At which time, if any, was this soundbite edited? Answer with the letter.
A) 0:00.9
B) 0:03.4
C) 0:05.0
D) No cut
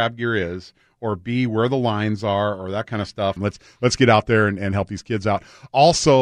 B